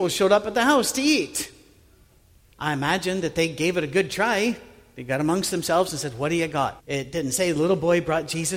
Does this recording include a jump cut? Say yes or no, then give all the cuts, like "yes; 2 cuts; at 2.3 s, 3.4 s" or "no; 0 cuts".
yes; 2 cuts; at 2.5 s, 6.8 s